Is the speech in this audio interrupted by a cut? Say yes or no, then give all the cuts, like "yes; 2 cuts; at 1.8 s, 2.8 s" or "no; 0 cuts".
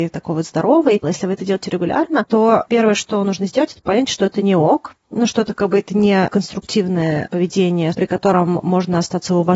yes; 2 cuts; at 1.0 s, 7.9 s